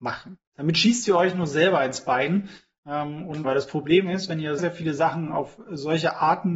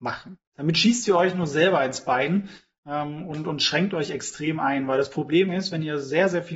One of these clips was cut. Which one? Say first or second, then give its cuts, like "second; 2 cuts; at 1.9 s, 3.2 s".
first; 2 cuts; at 3.4 s, 4.6 s